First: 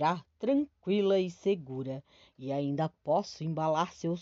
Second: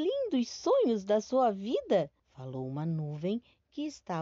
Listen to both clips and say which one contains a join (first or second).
second